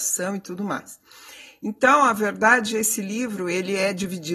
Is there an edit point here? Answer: no; 0 cuts

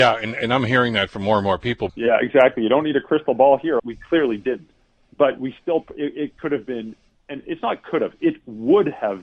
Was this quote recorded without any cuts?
no; 2 cuts; at 1.9 s, 3.8 s

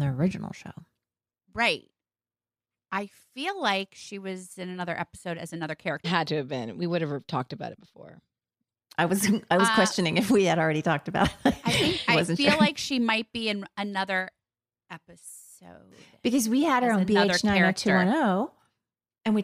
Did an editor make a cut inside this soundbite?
yes; 1 cut; at 6.0 s

